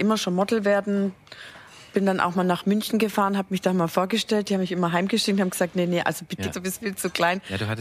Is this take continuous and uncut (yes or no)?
no